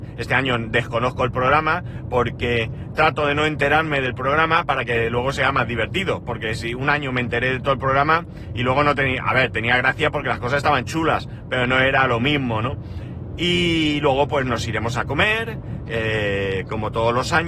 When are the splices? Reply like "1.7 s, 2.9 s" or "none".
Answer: none